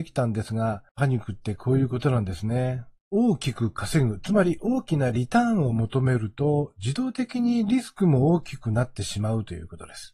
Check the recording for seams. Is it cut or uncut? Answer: uncut